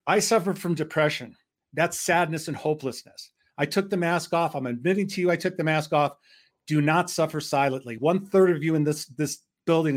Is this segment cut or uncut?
uncut